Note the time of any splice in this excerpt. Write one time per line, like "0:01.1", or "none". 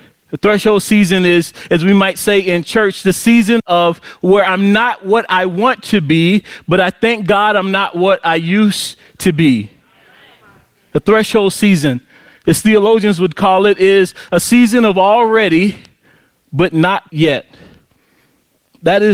0:17.1